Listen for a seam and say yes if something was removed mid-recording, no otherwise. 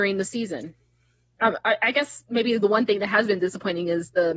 no